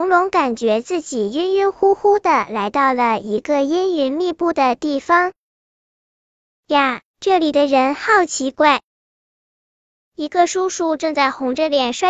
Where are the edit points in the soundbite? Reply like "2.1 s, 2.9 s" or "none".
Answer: none